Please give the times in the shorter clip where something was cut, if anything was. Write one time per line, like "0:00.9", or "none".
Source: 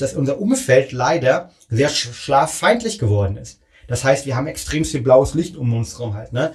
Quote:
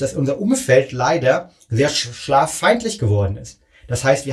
none